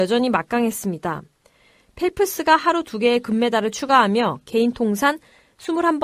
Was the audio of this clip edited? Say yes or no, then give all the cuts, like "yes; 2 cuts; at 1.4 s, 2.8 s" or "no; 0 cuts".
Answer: no; 0 cuts